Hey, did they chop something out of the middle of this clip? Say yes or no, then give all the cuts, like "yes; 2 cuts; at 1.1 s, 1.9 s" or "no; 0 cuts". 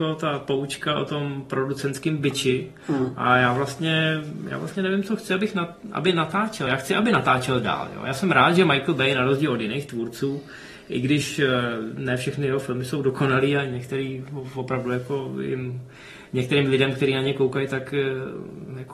no; 0 cuts